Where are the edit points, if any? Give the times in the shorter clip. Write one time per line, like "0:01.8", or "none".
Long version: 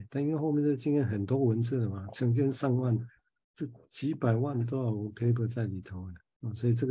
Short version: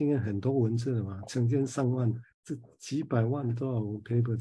0:02.3

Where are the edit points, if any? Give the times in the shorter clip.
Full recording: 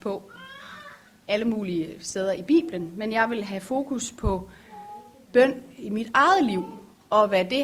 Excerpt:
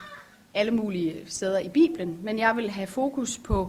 none

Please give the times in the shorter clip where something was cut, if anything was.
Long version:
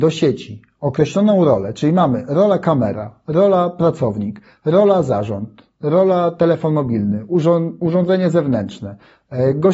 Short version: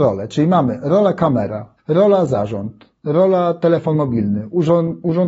0:01.8

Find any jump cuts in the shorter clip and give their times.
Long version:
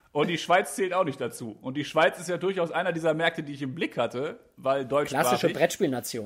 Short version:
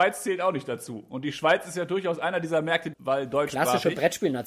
0:02.9

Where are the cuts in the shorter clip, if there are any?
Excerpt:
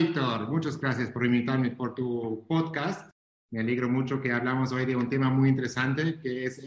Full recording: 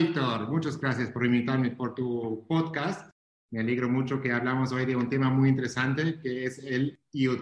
none

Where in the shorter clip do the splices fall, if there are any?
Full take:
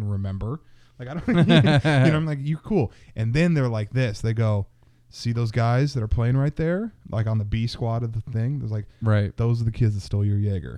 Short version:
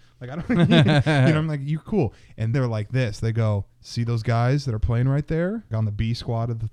0:02.5
0:03.7
0:05.7

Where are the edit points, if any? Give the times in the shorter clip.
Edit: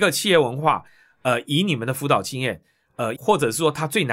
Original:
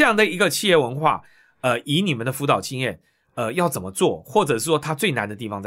0:03.2

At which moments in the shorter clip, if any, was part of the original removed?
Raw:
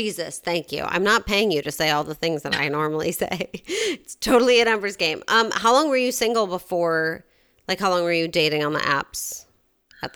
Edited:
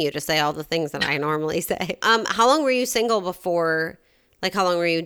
0:02.0

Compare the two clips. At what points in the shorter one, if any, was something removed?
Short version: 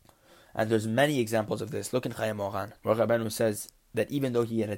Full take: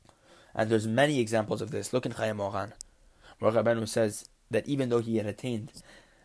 0:02.8

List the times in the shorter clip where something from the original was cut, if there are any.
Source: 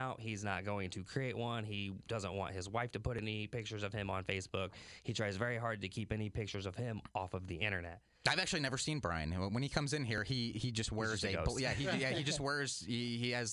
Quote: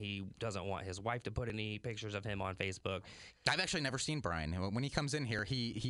0:03.3

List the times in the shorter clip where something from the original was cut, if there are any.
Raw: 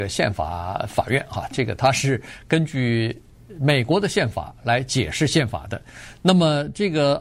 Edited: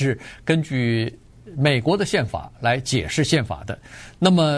none

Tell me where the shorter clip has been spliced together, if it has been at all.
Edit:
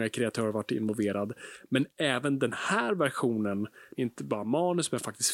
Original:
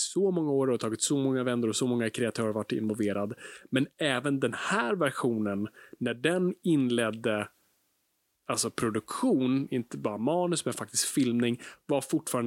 0:03.9

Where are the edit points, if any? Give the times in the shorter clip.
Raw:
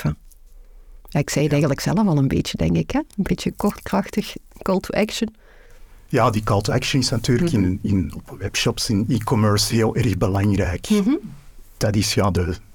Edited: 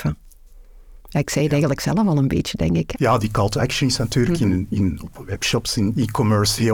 0:02.9

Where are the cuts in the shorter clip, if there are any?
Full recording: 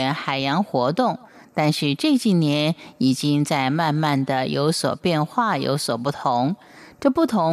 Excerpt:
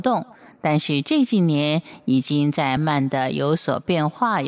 0:02.8

